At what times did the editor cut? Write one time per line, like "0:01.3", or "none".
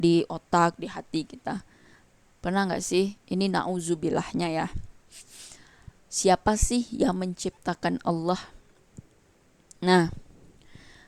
none